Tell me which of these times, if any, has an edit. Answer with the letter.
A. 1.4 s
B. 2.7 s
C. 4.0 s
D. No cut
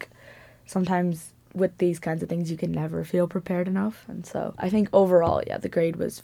D